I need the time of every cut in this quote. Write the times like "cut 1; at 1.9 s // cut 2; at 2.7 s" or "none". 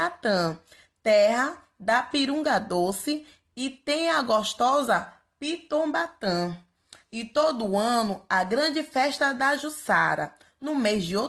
none

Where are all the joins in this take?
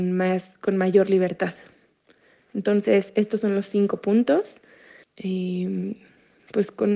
cut 1; at 5.0 s

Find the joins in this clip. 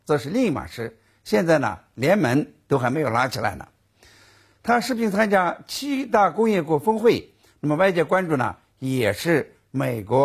cut 1; at 4.6 s

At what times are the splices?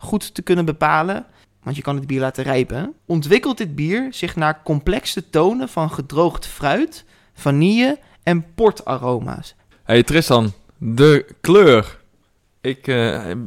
cut 1; at 1.4 s // cut 2; at 3.0 s // cut 3; at 9.7 s

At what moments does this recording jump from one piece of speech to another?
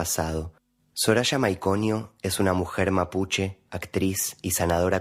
cut 1; at 3.7 s

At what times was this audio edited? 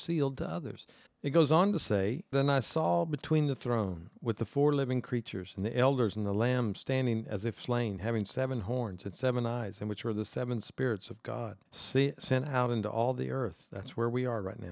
cut 1; at 1.1 s // cut 2; at 2.3 s // cut 3; at 11.7 s

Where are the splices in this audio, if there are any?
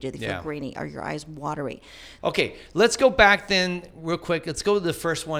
cut 1; at 2.2 s

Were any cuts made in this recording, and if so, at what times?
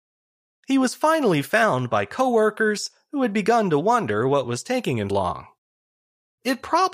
cut 1; at 5.1 s

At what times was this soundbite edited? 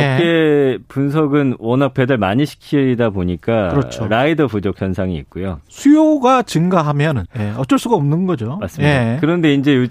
cut 1; at 7.2 s

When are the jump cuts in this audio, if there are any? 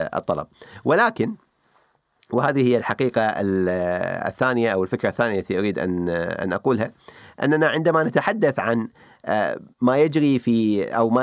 cut 1; at 9.7 s

